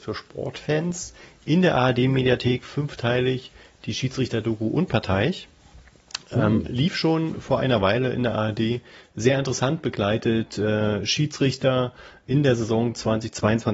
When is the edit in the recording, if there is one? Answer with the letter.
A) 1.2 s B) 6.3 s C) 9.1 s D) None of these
D